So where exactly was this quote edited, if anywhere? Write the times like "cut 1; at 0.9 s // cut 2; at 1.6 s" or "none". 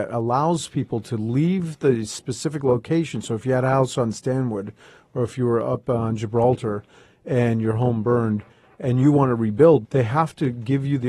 cut 1; at 9.8 s